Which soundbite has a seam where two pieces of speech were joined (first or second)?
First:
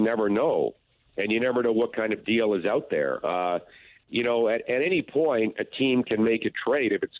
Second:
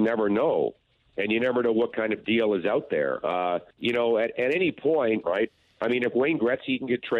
second